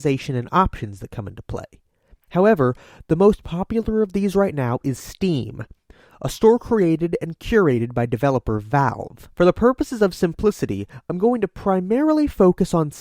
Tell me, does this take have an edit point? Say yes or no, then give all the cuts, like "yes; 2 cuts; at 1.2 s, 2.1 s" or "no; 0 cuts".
yes; 2 cuts; at 2.1 s, 9.3 s